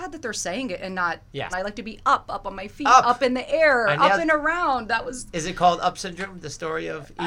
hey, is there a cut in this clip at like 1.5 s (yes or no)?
yes